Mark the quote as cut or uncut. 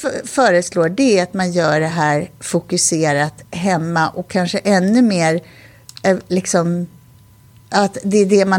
uncut